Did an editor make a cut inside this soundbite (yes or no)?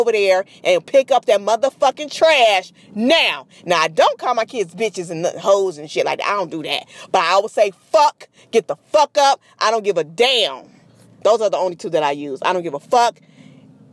no